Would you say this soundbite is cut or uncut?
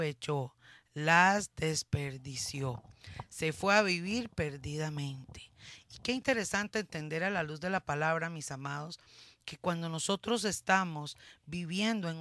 uncut